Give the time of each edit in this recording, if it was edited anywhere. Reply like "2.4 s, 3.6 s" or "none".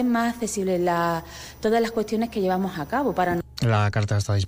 none